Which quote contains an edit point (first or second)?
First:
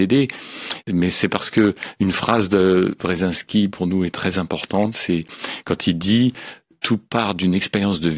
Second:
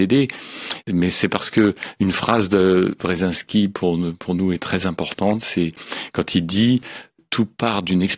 first